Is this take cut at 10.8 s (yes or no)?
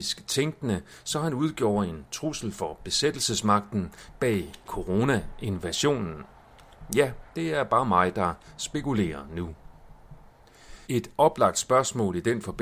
yes